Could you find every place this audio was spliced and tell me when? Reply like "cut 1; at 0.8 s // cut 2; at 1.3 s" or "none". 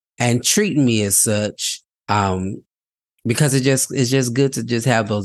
cut 1; at 1.9 s